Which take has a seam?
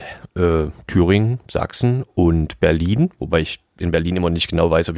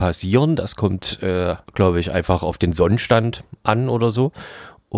second; 1 cut; at 1.6 s

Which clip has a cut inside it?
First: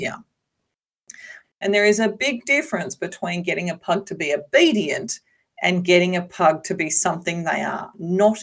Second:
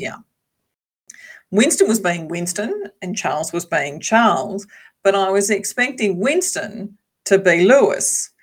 first; 1 cut; at 1.4 s

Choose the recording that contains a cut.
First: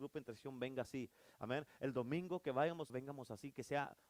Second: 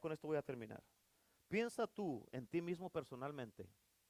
first; 1 cut; at 2.9 s

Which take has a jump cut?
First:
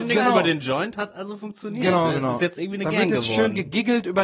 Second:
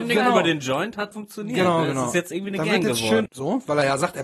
second; 2 cuts; at 1.1 s, 3.3 s

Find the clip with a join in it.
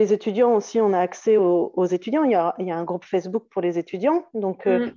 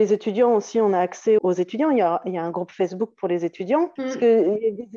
second; 2 cuts; at 1.4 s, 4.0 s

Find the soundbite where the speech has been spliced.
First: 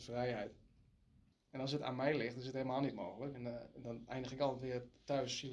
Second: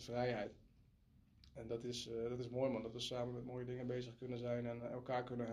first; 2 cuts; at 1.3 s, 3.3 s

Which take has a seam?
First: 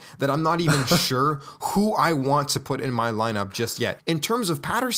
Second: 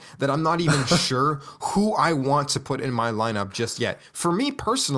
first; 1 cut; at 4.0 s

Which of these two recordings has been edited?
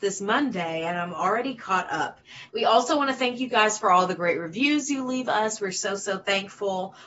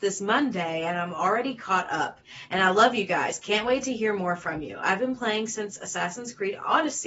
first; 1 cut; at 2.5 s

